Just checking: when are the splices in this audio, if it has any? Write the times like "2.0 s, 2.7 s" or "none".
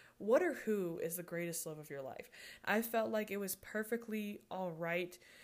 2.6 s